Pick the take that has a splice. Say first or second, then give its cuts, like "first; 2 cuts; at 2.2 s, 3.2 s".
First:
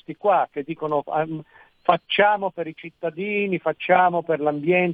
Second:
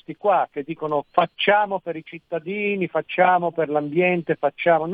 second; 1 cut; at 1.0 s